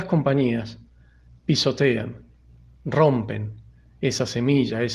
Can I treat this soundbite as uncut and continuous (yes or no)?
yes